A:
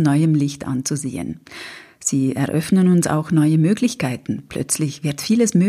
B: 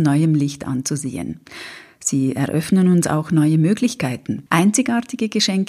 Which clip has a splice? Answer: B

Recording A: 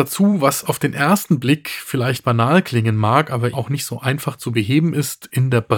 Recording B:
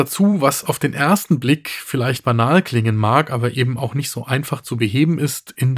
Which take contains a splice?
A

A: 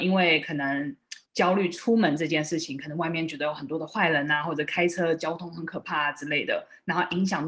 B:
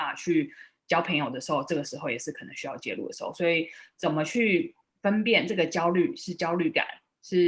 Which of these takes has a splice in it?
A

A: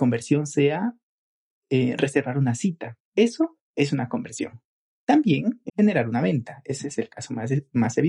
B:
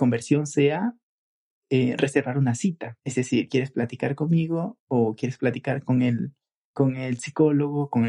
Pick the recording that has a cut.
A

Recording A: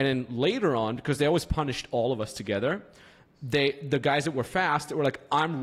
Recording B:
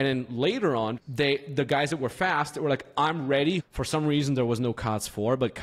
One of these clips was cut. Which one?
B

